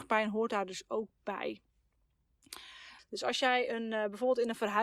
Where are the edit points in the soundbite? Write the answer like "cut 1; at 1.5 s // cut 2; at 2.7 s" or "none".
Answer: cut 1; at 3.0 s